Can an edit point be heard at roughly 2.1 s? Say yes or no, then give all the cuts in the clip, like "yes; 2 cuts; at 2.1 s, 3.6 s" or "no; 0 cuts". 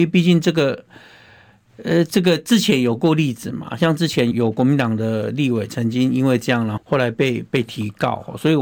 no; 2 cuts; at 4.3 s, 6.8 s